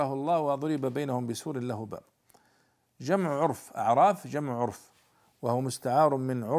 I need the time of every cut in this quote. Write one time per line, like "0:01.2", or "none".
none